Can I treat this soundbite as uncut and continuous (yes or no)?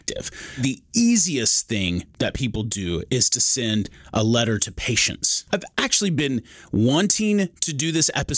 no